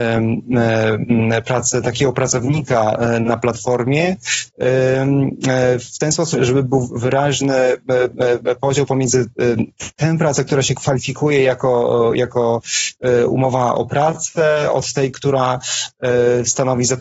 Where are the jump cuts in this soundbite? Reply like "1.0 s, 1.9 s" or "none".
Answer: 6.3 s

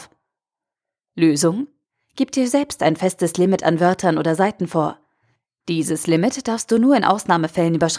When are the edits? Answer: none

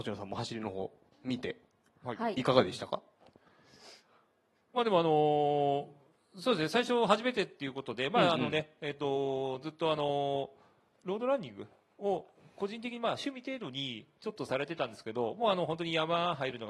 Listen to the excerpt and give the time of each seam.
none

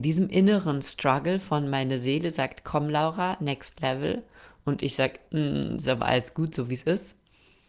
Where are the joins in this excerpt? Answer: none

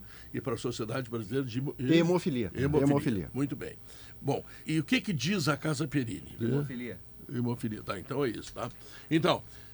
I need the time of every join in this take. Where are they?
4.6 s, 6.4 s

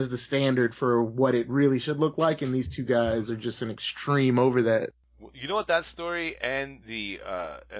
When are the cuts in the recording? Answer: none

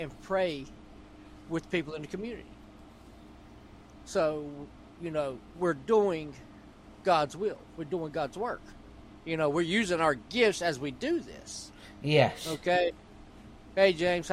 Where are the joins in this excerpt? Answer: 5.5 s

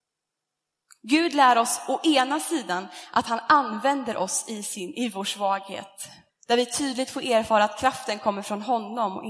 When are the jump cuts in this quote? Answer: 6.3 s

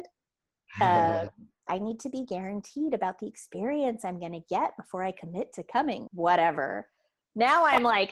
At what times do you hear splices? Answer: 1.7 s, 6.1 s

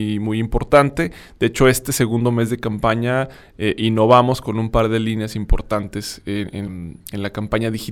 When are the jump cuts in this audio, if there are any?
6.7 s

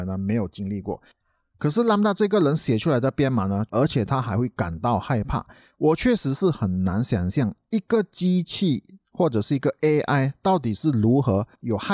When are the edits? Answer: 3.7 s

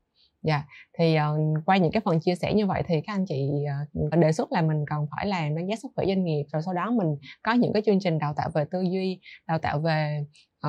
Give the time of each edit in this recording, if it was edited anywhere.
4.1 s

